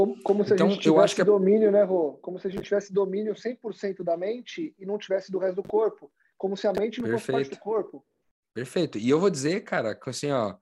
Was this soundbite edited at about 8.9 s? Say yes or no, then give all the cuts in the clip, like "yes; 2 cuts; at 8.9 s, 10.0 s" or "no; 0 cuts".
no; 0 cuts